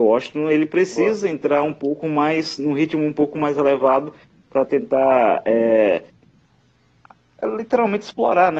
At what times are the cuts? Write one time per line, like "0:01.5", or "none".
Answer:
none